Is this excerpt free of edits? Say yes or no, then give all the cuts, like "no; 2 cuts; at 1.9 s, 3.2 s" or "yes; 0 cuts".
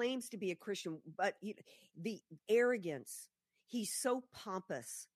no; 1 cut; at 2.4 s